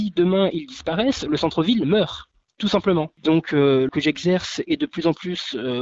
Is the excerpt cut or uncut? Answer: cut